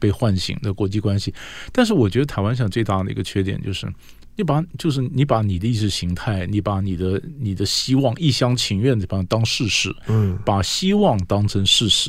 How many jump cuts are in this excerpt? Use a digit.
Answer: 0